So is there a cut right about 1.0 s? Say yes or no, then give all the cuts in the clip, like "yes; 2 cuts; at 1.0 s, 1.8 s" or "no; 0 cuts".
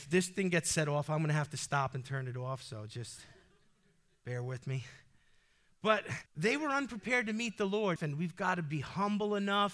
no; 2 cuts; at 6.3 s, 8.0 s